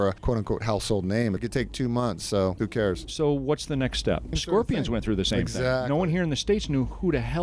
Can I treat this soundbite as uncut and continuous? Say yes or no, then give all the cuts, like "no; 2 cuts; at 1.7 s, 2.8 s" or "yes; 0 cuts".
no; 2 cuts; at 1.4 s, 4.3 s